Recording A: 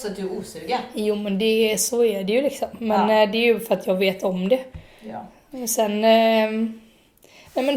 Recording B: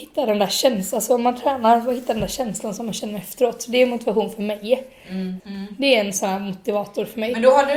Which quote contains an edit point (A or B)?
B